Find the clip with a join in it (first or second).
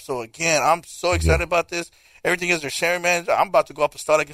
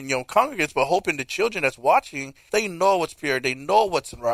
second